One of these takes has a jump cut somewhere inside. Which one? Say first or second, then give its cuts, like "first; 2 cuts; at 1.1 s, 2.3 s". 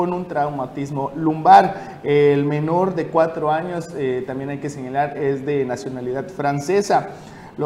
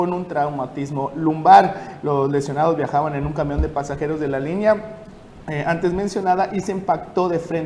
second; 1 cut; at 2.0 s